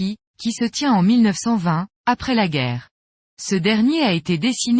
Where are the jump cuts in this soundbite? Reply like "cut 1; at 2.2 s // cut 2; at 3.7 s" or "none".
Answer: cut 1; at 3.3 s